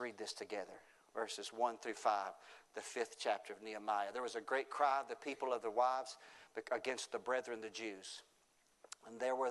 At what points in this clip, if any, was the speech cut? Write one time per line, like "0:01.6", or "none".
none